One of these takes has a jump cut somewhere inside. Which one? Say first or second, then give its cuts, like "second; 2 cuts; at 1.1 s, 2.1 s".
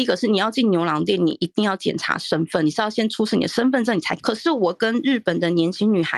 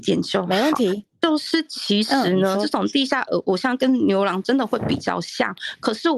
first; 1 cut; at 4.2 s